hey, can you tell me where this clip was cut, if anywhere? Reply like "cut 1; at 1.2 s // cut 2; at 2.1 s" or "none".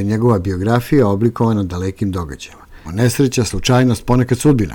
cut 1; at 2.8 s

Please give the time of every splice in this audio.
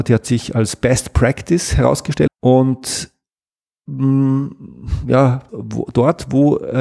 cut 1; at 2.3 s // cut 2; at 5.5 s

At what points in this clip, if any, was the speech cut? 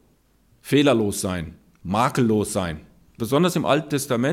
cut 1; at 3.2 s

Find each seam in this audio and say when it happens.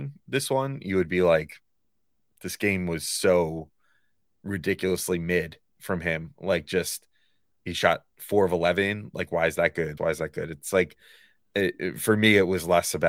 cut 1; at 10.0 s

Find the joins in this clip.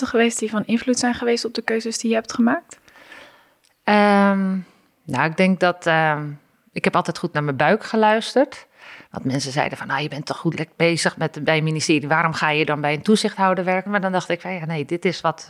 cut 1; at 13.9 s

